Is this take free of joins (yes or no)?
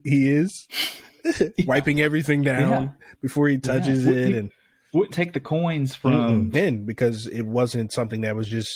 no